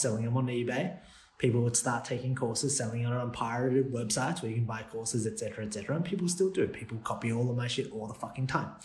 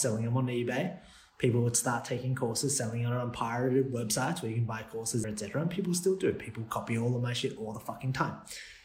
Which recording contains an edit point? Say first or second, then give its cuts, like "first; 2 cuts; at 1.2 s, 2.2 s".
second; 1 cut; at 5.2 s